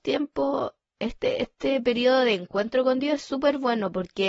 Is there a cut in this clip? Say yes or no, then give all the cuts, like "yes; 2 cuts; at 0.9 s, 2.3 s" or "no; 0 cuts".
no; 0 cuts